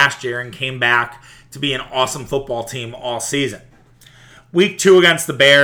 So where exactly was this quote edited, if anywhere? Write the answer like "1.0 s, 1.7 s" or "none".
none